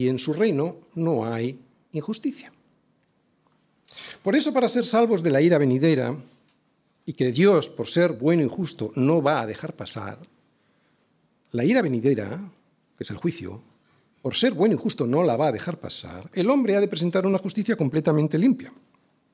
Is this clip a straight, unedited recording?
yes; 0 cuts

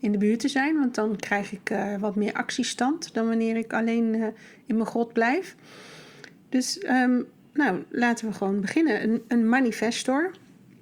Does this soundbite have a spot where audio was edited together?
no; 0 cuts

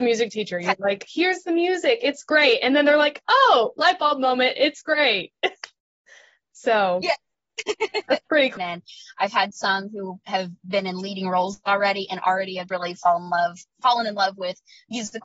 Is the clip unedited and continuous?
no; 2 cuts; at 8.6 s, 12.7 s

